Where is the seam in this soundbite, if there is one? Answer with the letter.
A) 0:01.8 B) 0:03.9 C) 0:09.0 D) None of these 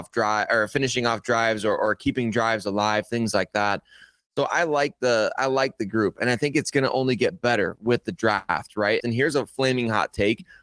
C